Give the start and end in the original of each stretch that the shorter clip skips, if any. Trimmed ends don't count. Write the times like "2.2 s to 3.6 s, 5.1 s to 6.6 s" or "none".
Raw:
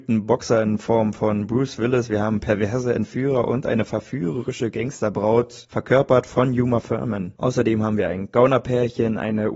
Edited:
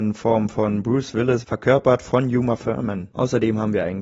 2.1 s to 5.7 s